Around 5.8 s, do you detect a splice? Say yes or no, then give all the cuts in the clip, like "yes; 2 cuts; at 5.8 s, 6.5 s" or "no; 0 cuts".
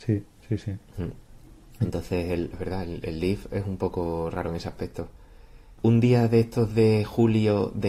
yes; 2 cuts; at 2.5 s, 5.8 s